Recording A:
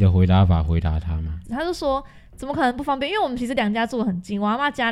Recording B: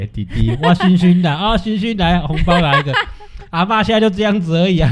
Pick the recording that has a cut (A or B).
A